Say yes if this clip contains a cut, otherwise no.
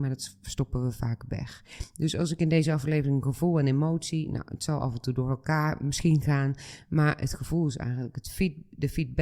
no